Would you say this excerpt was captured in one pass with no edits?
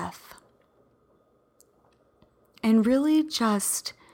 yes; 0 cuts

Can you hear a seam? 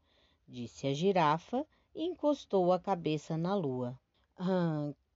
yes; 1 cut; at 4.1 s

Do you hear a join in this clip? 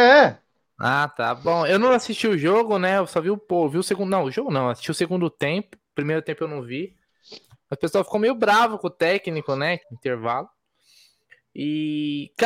yes; 2 cuts; at 7.5 s, 9.8 s

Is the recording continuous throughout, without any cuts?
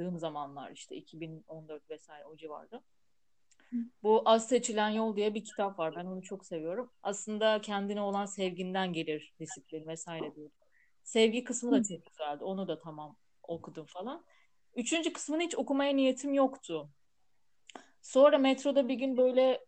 no; 1 cut; at 6.9 s

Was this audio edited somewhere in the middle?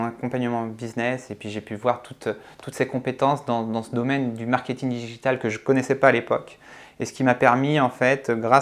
no; 0 cuts

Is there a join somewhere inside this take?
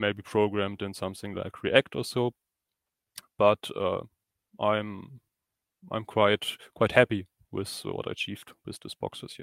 no; 0 cuts

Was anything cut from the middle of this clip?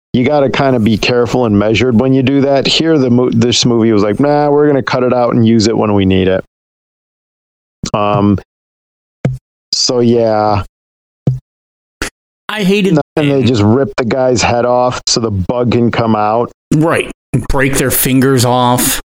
yes; 1 cut; at 13.0 s

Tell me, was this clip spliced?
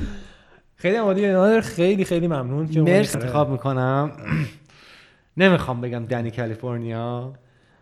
yes; 1 cut; at 3.1 s

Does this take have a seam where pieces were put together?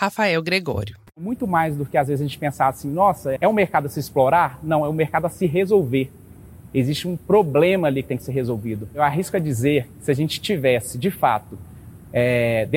yes; 1 cut; at 3.4 s

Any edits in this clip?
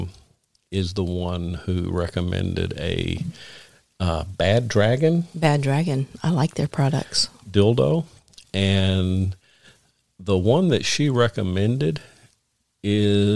no; 0 cuts

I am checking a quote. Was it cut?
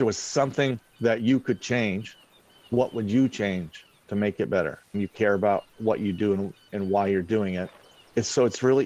yes; 2 cuts; at 4.9 s, 6.7 s

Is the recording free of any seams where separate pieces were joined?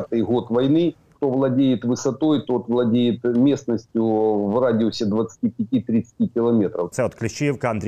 no; 2 cuts; at 1.2 s, 6.9 s

